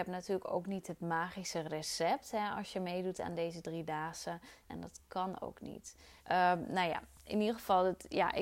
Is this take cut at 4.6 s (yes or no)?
yes